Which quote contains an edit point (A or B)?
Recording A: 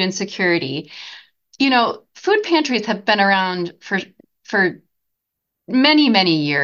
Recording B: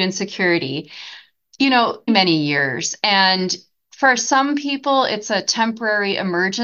B